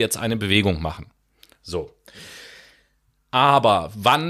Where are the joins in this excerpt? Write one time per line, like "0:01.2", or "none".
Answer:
none